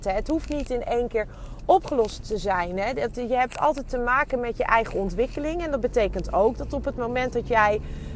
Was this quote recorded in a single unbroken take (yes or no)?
no